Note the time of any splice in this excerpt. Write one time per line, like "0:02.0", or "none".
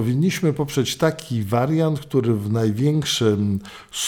none